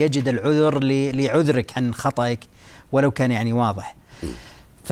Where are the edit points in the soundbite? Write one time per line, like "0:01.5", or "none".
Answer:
0:01.7

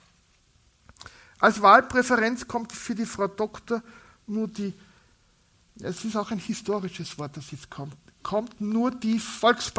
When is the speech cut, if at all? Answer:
none

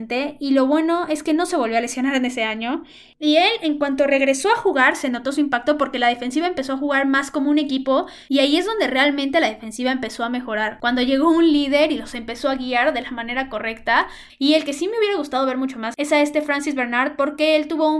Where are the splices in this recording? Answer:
0:14.3

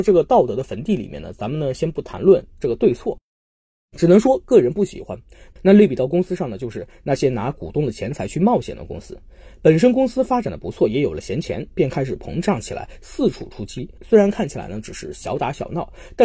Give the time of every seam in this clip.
none

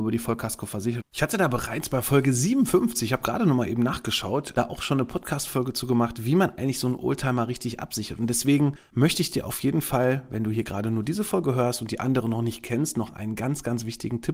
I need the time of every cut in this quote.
0:01.0

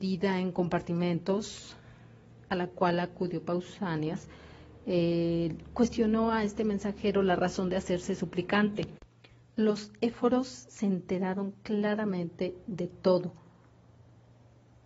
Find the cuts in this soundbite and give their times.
none

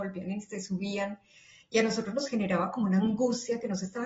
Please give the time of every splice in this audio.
none

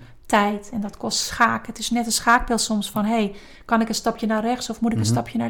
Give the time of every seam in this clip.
none

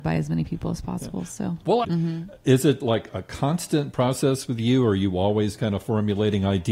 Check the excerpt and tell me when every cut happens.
0:01.8

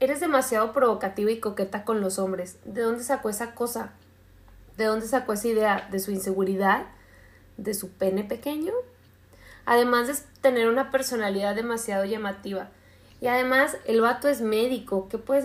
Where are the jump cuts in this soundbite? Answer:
0:13.1

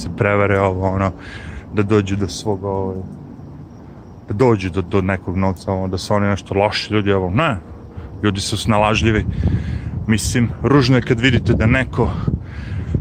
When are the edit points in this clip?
none

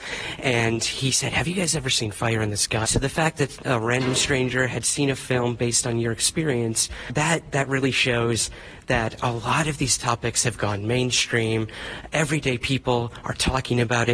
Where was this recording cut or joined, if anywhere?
0:02.8

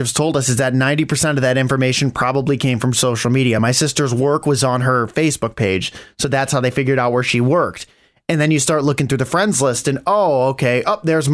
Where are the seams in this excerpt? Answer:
none

